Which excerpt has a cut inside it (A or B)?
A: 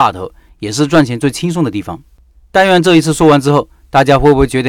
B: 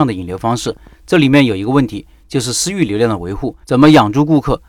B